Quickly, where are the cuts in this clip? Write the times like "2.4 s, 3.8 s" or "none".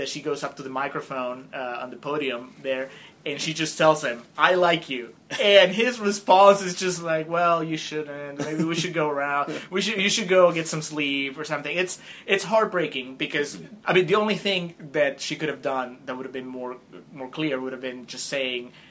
none